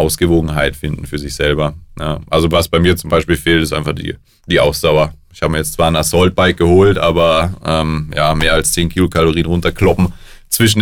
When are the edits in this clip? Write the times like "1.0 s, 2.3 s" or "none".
none